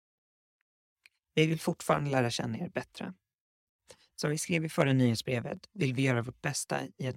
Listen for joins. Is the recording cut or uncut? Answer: uncut